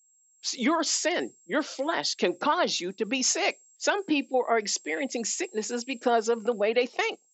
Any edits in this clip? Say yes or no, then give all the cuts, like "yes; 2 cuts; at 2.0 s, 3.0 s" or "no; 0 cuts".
yes; 1 cut; at 3.8 s